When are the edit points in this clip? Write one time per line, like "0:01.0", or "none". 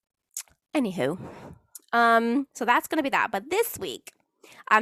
none